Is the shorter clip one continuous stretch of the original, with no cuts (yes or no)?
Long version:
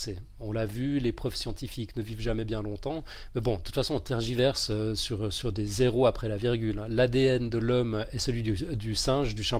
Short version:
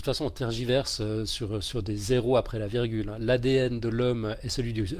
yes